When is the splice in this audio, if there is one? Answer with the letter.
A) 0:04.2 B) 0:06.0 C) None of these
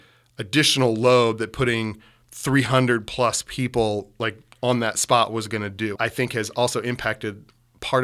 B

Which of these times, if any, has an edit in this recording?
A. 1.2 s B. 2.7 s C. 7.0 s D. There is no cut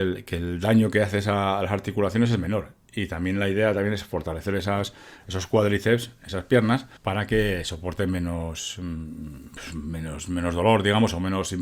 C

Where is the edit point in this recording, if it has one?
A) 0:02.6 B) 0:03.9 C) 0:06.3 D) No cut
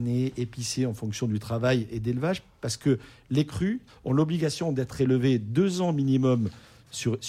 B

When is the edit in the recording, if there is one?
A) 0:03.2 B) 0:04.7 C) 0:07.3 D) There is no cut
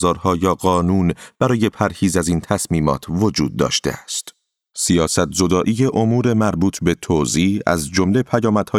B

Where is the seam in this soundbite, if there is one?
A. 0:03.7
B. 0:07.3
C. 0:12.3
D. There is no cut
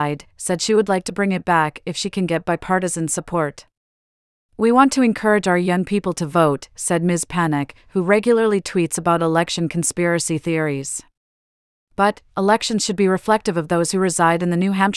C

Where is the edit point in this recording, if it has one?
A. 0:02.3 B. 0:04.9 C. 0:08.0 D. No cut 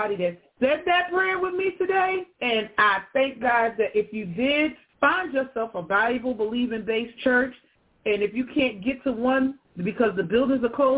A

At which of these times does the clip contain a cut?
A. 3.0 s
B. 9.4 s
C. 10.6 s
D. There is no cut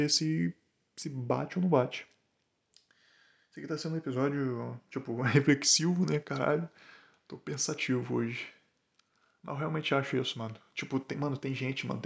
D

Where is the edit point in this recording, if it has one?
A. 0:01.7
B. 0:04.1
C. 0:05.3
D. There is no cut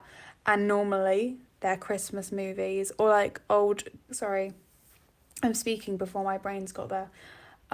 B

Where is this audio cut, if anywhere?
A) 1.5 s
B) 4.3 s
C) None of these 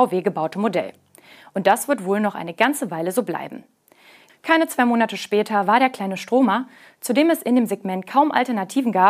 B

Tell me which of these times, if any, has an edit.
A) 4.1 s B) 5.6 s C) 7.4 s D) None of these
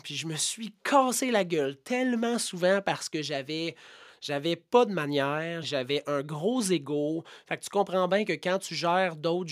B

